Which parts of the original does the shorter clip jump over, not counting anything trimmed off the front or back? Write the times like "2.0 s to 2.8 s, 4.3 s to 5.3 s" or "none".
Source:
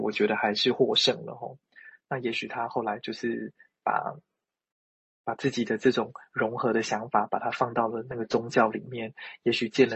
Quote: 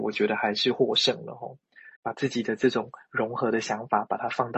2.0 s to 5.2 s